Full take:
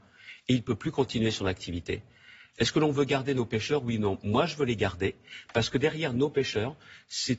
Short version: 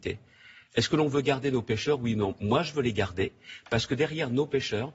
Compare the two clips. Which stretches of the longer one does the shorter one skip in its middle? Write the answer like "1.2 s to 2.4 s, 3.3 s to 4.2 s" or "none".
none